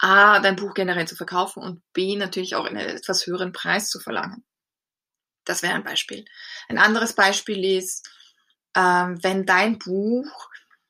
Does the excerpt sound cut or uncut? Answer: uncut